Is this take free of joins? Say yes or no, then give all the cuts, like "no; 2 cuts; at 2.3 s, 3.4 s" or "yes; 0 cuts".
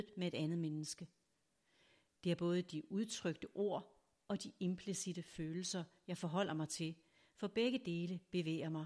yes; 0 cuts